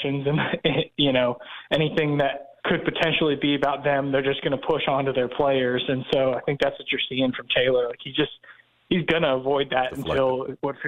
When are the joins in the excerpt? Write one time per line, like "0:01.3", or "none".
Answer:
0:02.6